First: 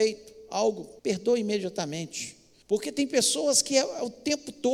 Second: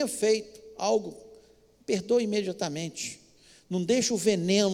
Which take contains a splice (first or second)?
first